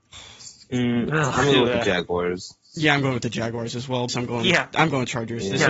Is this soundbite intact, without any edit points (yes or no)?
no